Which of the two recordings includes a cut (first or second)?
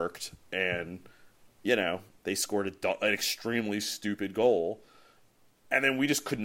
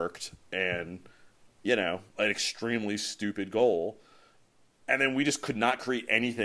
second